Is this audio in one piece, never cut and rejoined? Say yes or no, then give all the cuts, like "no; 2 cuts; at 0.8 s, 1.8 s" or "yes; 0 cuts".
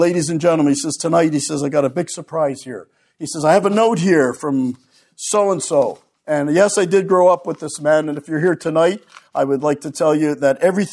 yes; 0 cuts